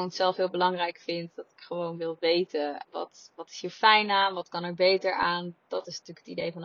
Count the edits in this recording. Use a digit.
1